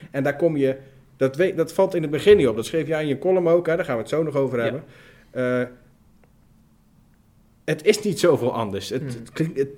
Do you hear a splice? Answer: no; 0 cuts

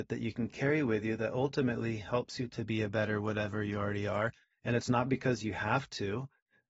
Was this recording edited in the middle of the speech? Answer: no; 0 cuts

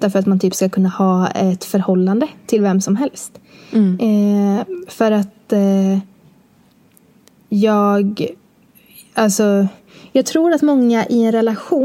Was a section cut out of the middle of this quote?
no; 0 cuts

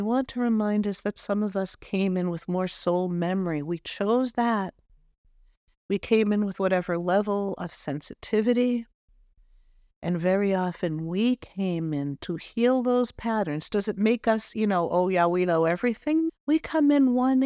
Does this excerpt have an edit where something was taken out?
yes; 1 cut; at 16.3 s

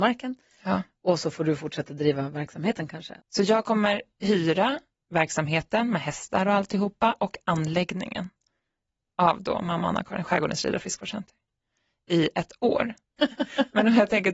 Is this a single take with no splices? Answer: no; 2 cuts; at 3.2 s, 13.2 s

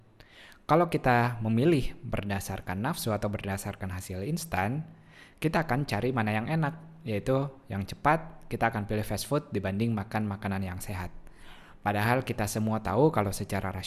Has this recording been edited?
no; 0 cuts

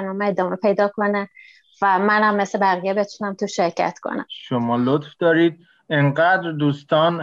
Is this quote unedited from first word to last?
yes; 0 cuts

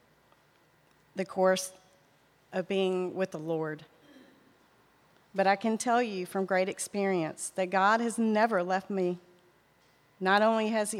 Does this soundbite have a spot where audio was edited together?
no; 0 cuts

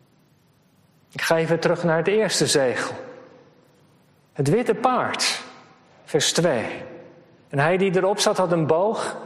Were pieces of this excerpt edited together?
no; 0 cuts

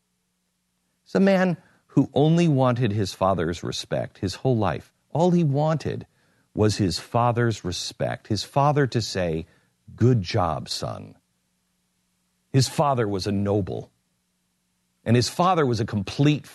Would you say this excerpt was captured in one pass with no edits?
yes; 0 cuts

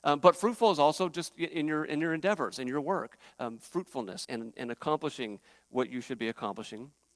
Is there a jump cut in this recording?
yes; 1 cut; at 4.2 s

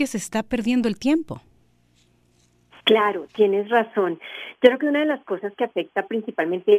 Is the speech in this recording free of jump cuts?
yes; 0 cuts

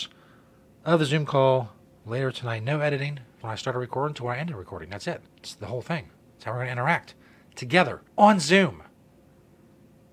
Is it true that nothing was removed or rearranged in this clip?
no; 3 cuts; at 3.4 s, 5.3 s, 8.1 s

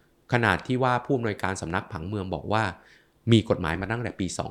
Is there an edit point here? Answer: no; 0 cuts

